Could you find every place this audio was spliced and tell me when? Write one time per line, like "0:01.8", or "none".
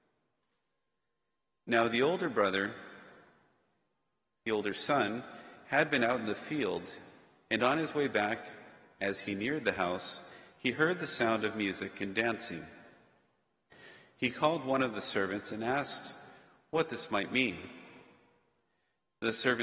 none